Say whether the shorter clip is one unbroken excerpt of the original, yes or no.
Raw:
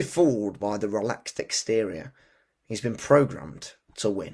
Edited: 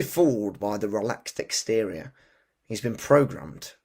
yes